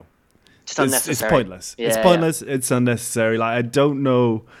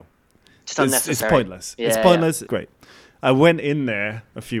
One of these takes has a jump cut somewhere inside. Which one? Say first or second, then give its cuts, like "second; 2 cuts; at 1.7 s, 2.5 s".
second; 1 cut; at 2.5 s